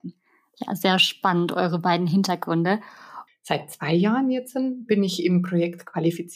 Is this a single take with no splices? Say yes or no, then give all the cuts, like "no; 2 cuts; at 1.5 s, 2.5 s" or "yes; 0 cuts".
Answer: no; 1 cut; at 3.3 s